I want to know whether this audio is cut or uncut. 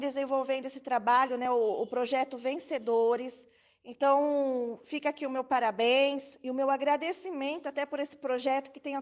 uncut